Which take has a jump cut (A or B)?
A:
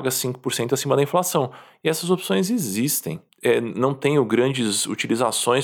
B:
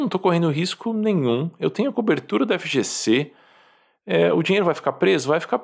A